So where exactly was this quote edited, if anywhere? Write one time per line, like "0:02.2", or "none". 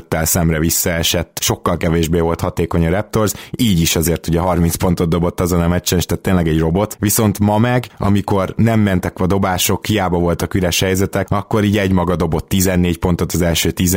none